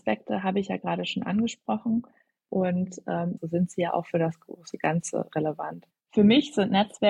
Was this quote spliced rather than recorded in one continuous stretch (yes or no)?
yes